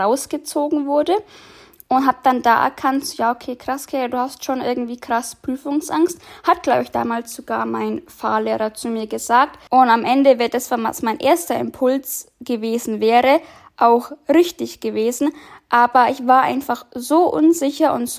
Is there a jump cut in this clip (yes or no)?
yes